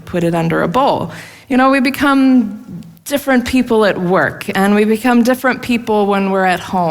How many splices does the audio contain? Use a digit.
1